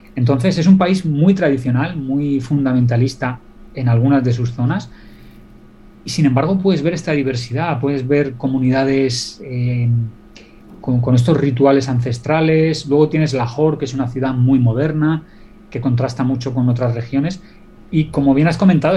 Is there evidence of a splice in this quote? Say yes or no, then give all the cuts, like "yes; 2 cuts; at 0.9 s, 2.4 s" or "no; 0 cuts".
no; 0 cuts